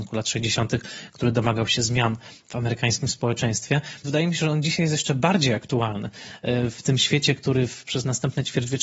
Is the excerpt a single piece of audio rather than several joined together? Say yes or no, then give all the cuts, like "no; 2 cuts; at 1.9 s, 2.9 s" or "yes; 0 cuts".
no; 1 cut; at 4.0 s